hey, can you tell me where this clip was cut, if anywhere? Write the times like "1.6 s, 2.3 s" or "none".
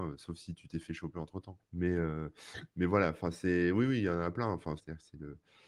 1.6 s, 4.8 s